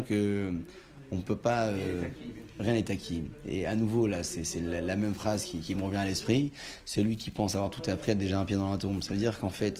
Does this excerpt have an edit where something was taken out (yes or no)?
no